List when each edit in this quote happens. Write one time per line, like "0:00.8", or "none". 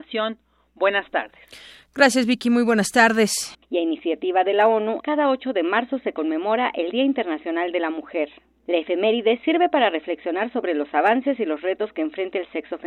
0:03.5
0:05.0